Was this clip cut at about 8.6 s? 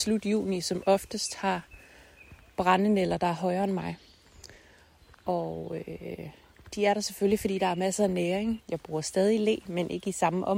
yes; 1 cut; at 8.6 s

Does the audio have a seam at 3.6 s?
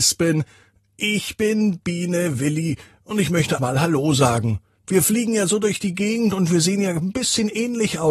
yes; 1 cut; at 3.6 s

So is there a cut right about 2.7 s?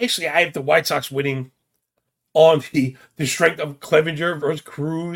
no; 0 cuts

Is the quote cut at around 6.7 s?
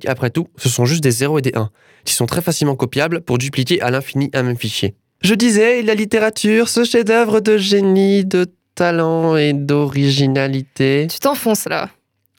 no; 1 cut; at 5.2 s

